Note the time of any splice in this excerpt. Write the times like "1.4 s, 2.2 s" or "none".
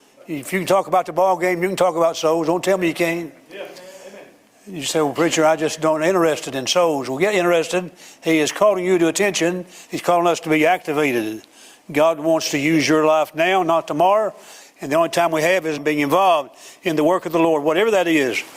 9.9 s, 14.6 s, 15.8 s